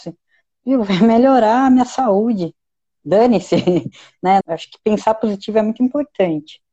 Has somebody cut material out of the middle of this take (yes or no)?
yes